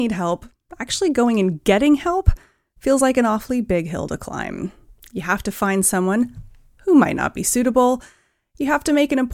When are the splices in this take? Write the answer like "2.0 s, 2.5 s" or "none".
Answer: none